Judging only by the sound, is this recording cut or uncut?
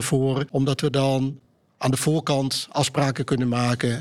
uncut